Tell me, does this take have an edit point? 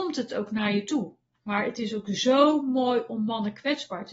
yes; 1 cut; at 1.3 s

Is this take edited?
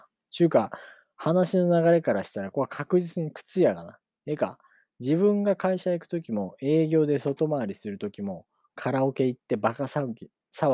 yes; 2 cuts; at 2.5 s, 4.2 s

